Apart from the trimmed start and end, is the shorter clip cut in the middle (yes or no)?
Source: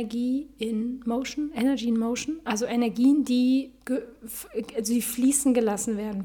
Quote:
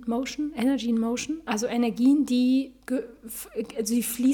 no